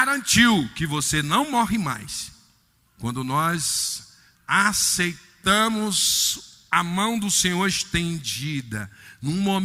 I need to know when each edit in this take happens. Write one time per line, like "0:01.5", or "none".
0:02.9
0:04.3